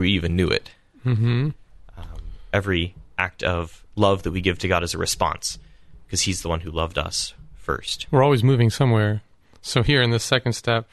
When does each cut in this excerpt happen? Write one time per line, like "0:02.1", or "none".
none